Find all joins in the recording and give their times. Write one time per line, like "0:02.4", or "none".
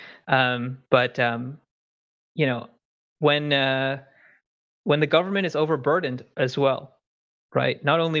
none